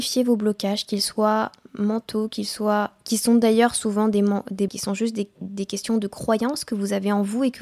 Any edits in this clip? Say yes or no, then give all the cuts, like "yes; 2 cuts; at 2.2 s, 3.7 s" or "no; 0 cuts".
yes; 1 cut; at 4.7 s